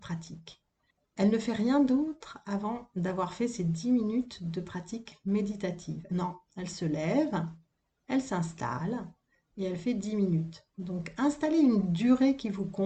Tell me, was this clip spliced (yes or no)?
yes